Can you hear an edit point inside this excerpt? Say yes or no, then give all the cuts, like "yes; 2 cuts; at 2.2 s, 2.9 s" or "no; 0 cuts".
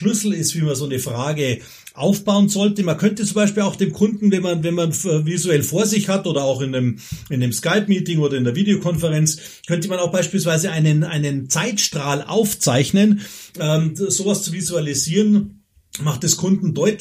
no; 0 cuts